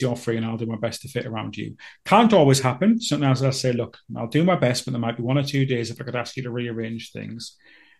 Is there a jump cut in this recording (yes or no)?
no